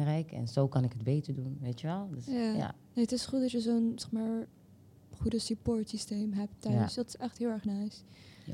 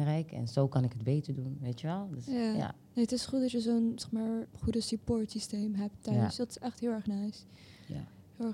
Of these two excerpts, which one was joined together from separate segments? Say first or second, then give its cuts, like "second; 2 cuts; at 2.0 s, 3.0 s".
second; 1 cut; at 4.5 s